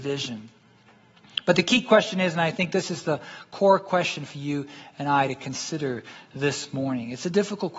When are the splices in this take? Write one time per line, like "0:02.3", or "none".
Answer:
none